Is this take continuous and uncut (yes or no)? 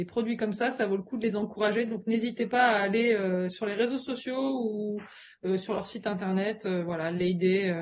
yes